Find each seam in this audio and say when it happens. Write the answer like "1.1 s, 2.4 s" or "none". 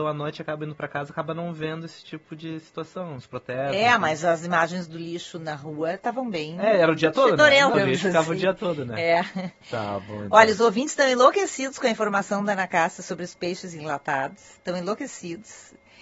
7.7 s, 14.6 s